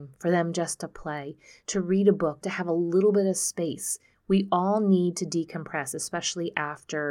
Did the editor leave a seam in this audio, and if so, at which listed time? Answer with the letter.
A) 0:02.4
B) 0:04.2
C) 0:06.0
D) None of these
A